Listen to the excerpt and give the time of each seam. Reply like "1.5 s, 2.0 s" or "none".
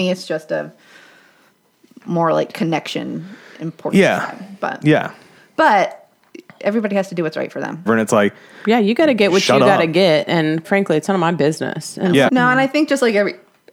7.9 s, 10.6 s, 12.3 s